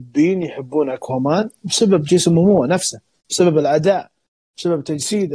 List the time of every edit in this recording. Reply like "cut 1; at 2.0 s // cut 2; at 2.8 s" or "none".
none